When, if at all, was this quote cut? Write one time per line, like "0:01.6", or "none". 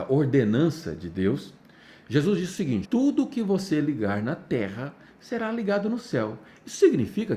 0:02.8